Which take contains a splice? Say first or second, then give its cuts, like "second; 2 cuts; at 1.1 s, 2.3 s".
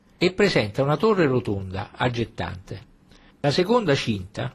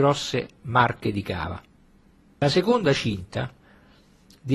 first; 1 cut; at 3.3 s